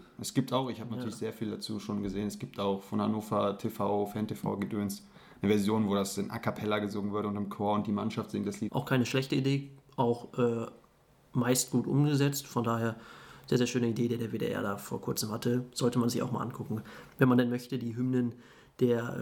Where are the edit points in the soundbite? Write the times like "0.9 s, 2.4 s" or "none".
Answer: 8.7 s

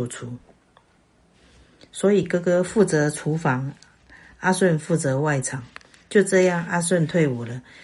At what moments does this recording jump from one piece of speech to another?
none

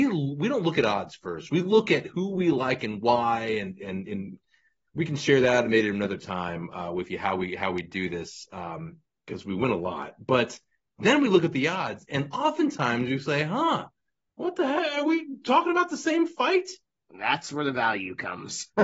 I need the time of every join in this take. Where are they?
none

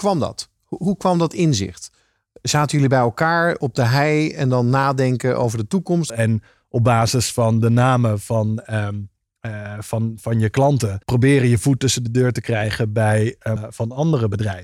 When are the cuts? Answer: 6.1 s, 11.0 s, 13.6 s

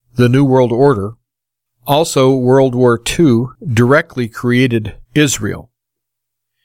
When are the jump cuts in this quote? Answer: 1.7 s, 3.6 s, 5.1 s

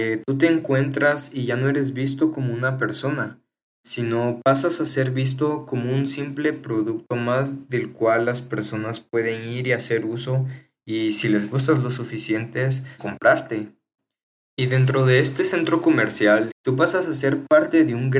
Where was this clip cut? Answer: 13.0 s, 16.5 s

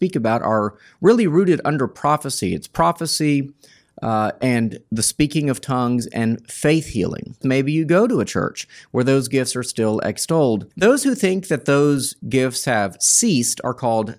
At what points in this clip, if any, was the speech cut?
7.4 s, 10.7 s

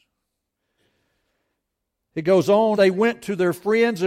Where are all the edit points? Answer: 2.8 s

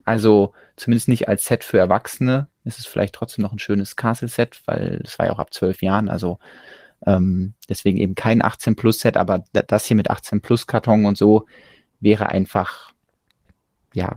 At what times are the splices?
none

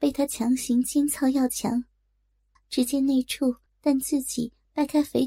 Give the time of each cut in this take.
2.6 s, 3.7 s

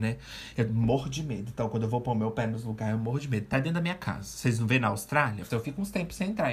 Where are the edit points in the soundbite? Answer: 5.5 s

